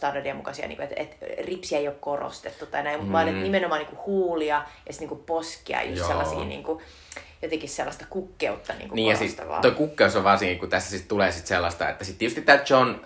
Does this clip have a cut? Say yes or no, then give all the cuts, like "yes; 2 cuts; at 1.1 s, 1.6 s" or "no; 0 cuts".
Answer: no; 0 cuts